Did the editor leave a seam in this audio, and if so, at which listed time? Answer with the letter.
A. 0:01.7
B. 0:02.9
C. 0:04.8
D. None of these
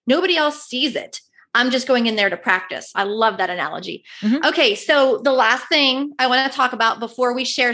B